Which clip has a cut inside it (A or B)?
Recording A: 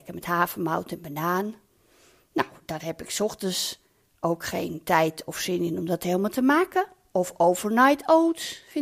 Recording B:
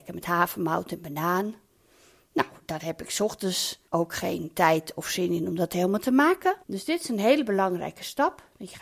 B